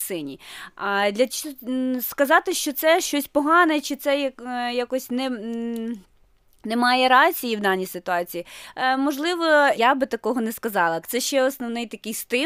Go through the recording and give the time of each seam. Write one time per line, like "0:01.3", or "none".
0:09.7
0:11.0

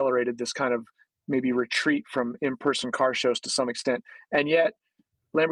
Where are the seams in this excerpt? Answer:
none

